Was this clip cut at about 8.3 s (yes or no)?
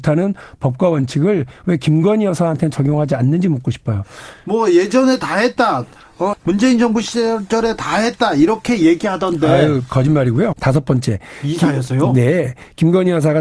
no